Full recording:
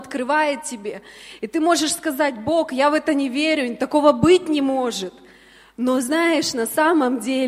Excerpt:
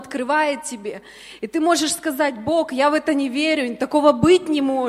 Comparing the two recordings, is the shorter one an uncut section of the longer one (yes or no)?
yes